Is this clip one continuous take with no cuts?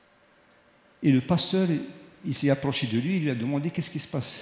yes; 0 cuts

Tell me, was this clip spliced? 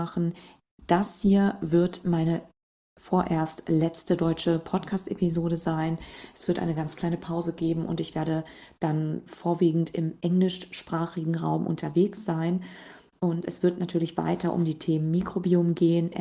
no; 0 cuts

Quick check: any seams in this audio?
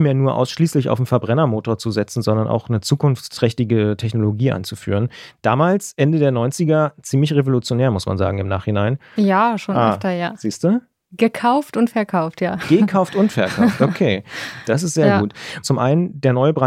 yes; 2 cuts; at 9.2 s, 15.6 s

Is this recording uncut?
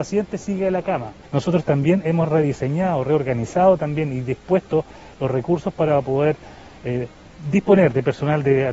no; 1 cut; at 1.2 s

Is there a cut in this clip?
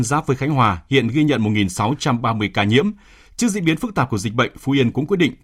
no; 0 cuts

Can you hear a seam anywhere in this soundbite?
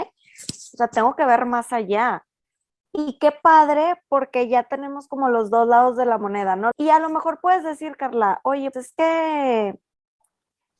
yes; 3 cuts; at 2.8 s, 6.7 s, 8.7 s

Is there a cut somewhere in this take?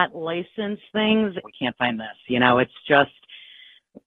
yes; 1 cut; at 1.4 s

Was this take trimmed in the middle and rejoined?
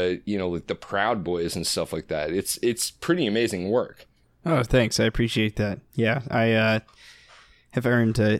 no; 0 cuts

